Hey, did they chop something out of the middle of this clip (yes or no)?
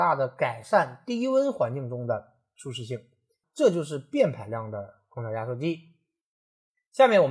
no